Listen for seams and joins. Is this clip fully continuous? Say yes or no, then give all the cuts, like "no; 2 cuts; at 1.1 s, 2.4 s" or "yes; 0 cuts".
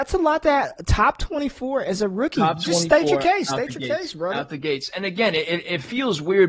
yes; 0 cuts